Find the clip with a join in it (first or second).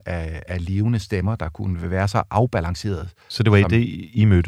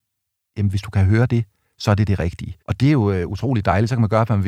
second